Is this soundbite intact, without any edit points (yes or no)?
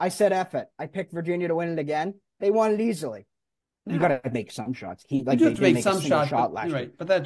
no